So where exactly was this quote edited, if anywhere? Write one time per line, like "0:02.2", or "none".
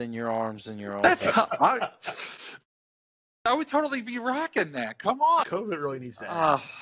0:05.4